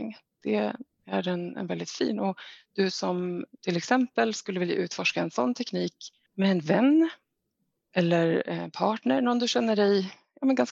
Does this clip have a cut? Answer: no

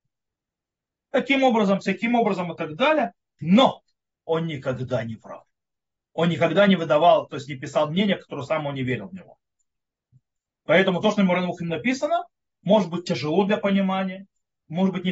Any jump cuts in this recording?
no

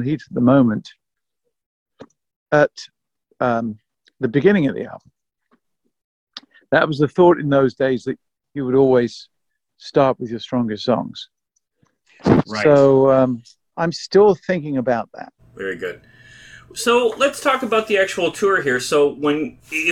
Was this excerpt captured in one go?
no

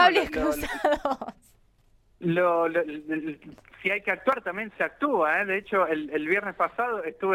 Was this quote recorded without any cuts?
yes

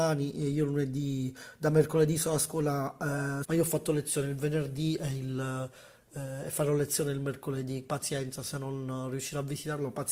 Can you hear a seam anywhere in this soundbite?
yes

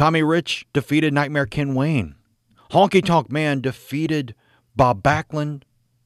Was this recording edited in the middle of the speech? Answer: yes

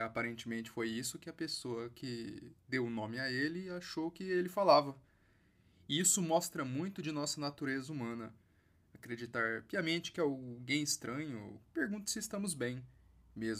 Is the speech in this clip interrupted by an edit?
yes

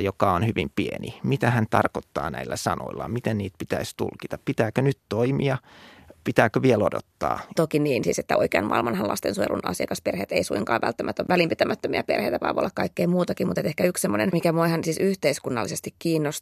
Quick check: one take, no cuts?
no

